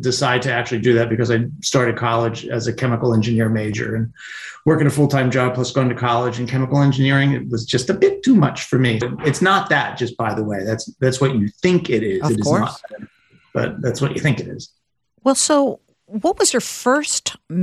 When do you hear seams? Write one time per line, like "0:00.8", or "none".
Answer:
0:09.0